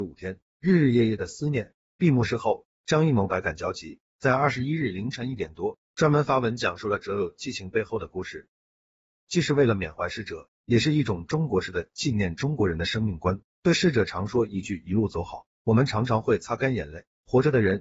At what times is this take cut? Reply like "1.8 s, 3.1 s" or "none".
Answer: 1.9 s